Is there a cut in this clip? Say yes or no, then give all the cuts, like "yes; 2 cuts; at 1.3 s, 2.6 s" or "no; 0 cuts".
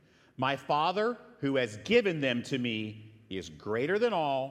no; 0 cuts